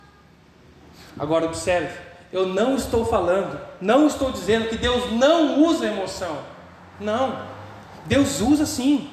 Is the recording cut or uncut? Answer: uncut